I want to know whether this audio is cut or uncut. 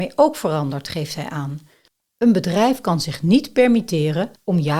uncut